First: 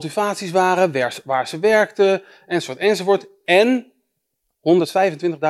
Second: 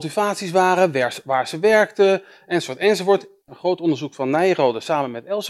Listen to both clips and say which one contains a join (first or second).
second